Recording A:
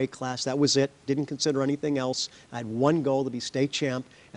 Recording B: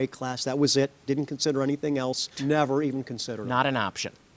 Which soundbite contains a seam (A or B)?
B